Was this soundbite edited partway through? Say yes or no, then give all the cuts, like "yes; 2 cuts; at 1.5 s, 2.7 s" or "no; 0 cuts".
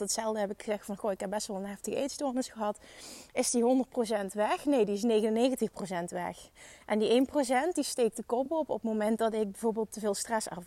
no; 0 cuts